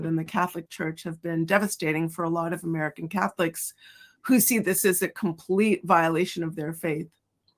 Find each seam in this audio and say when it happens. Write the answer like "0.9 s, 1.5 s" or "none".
none

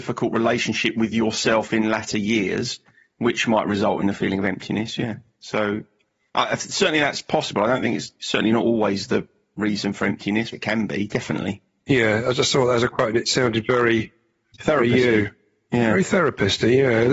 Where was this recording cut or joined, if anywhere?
10.5 s

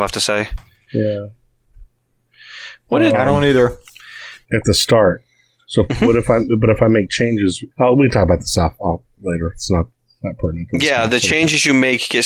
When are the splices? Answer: 4.4 s, 7.7 s

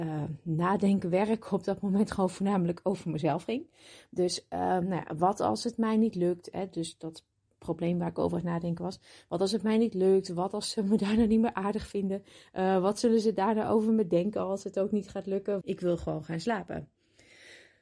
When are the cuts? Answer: 15.6 s

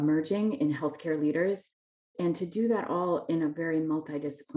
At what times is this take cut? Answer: none

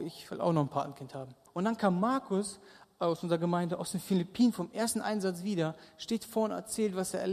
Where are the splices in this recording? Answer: 1.5 s

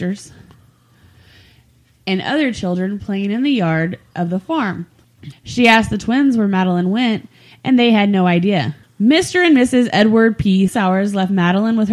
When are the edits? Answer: 5.3 s, 8.8 s, 10.7 s

